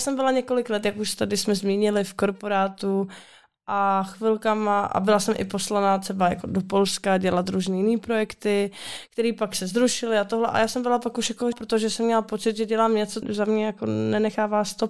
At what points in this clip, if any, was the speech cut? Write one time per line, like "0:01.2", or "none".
0:11.5
0:13.2